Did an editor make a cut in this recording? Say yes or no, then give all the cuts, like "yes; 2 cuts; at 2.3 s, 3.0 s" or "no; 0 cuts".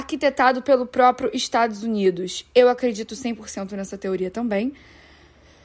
no; 0 cuts